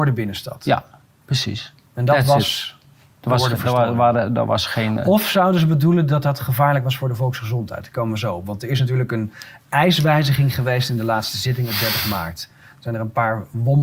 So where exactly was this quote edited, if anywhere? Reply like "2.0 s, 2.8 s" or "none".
none